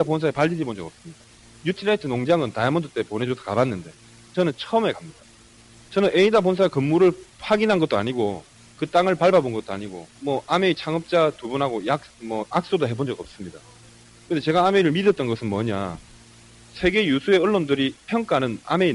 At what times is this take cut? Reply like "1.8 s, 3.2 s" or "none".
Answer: 10.1 s